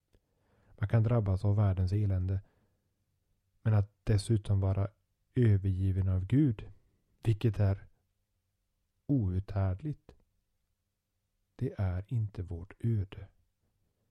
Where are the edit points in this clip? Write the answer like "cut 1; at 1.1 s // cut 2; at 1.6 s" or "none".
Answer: none